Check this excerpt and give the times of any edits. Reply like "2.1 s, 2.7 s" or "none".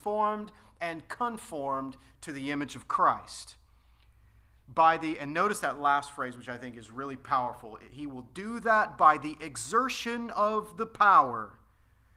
none